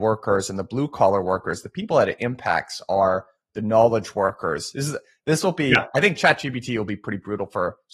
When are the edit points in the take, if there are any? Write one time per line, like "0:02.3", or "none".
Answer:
none